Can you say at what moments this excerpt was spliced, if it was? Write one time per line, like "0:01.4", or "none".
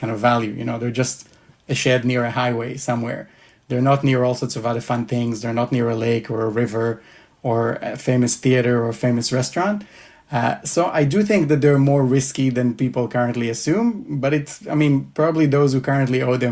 none